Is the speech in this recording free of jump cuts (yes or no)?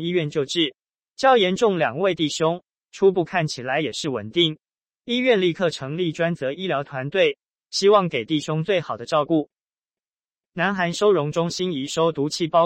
no